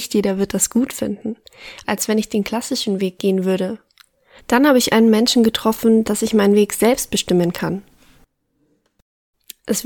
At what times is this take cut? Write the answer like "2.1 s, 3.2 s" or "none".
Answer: 1.8 s, 4.4 s, 6.0 s